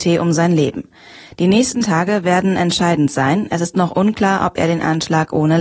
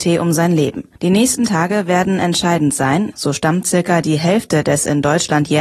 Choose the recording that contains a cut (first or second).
second